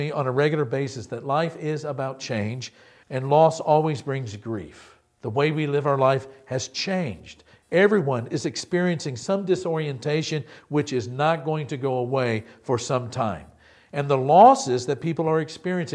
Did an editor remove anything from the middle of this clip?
yes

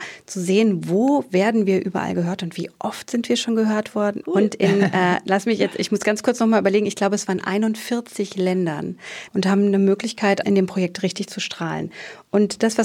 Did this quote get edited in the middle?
yes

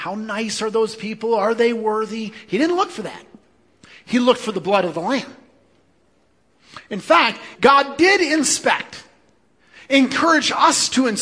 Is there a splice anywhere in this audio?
yes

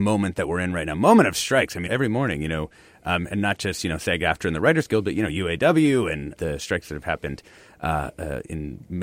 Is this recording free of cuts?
no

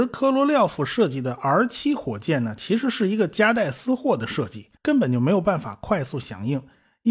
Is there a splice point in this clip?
yes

